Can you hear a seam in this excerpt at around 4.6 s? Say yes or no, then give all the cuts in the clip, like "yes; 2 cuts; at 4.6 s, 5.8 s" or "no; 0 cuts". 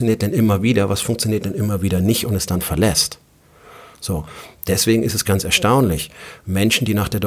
no; 0 cuts